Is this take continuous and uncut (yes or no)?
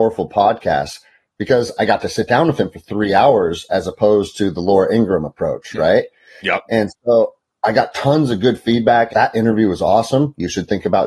no